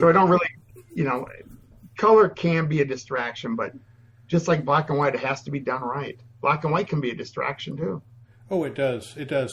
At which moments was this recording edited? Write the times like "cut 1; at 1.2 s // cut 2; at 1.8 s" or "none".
none